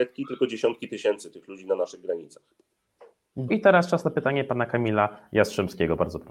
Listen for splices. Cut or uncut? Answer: cut